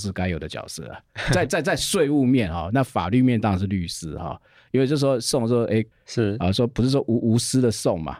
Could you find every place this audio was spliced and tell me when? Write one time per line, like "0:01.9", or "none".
0:05.9